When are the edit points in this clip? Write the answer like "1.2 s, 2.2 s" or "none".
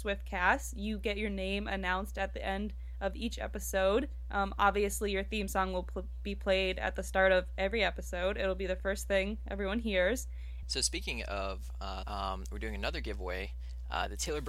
10.6 s, 12.0 s

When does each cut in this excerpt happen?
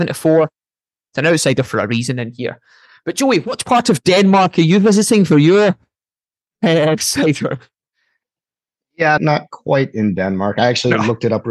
9.2 s

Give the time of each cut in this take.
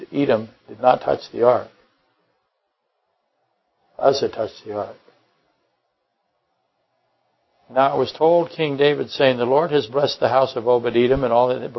none

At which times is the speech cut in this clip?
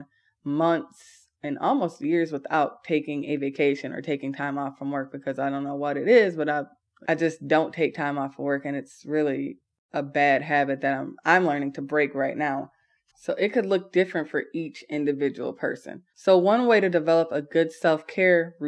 13.1 s, 16.1 s

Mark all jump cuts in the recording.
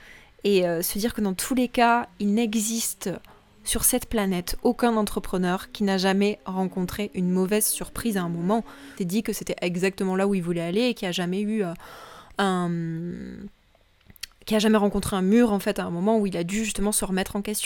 9.0 s

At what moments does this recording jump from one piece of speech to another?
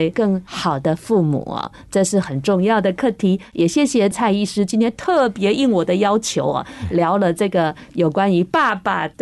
none

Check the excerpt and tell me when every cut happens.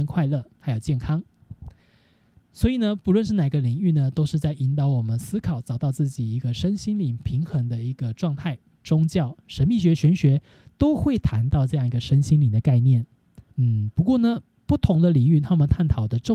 8.8 s, 13.5 s

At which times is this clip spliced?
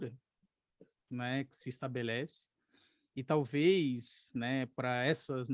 none

